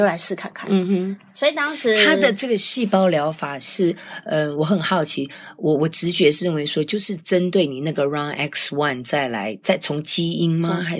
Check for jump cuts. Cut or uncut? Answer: uncut